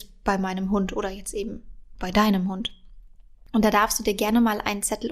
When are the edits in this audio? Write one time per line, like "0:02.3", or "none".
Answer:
none